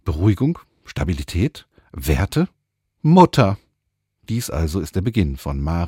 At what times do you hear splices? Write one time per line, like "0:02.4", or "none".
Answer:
none